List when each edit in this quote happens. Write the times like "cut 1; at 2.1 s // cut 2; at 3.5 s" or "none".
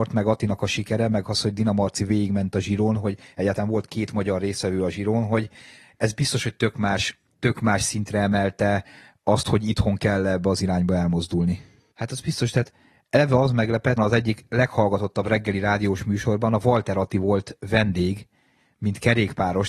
cut 1; at 11.9 s // cut 2; at 14.0 s